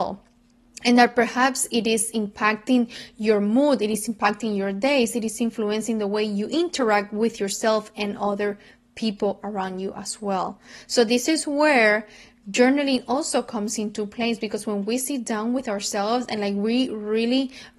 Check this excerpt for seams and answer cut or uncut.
uncut